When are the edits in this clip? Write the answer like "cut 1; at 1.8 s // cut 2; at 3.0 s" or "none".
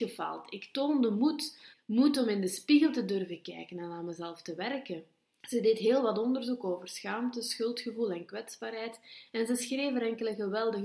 cut 1; at 1.7 s // cut 2; at 5.4 s